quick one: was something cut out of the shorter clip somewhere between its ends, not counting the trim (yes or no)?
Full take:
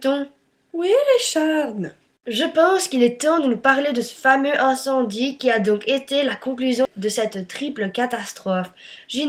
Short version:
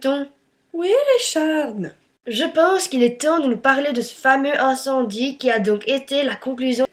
no